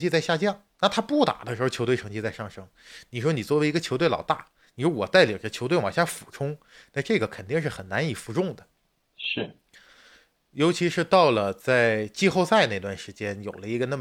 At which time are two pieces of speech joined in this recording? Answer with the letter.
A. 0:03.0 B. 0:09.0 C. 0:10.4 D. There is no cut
D